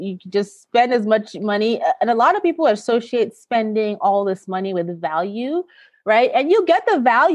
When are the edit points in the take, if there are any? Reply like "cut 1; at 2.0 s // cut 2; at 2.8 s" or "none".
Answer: none

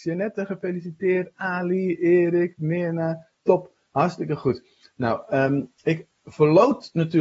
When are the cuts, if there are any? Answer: none

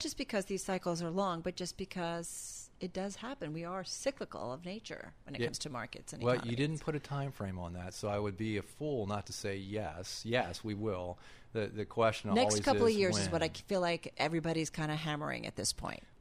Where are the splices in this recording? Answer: none

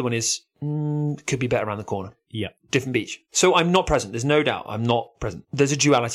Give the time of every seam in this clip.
none

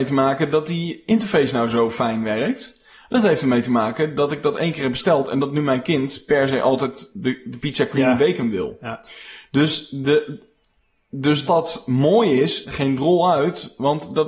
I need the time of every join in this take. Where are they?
cut 1; at 11.5 s // cut 2; at 12.6 s

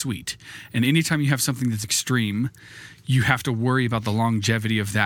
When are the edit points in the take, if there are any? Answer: cut 1; at 1.8 s

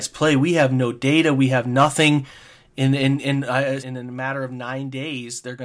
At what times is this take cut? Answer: cut 1; at 3.8 s

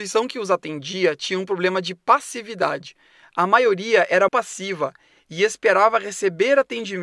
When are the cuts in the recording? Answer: cut 1; at 4.3 s

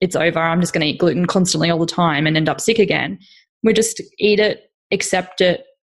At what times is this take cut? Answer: none

